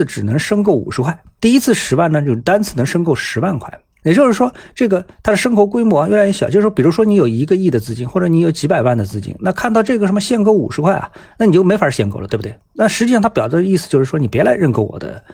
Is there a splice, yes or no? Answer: no